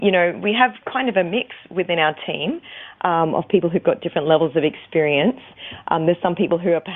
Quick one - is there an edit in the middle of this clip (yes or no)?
no